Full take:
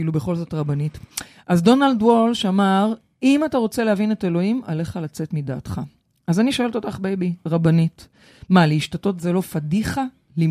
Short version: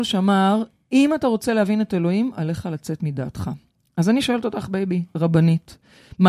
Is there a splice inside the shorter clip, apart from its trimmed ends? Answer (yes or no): no